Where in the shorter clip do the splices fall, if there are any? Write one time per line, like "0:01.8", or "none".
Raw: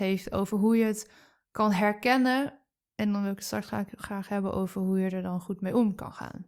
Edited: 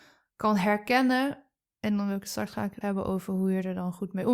0:02.8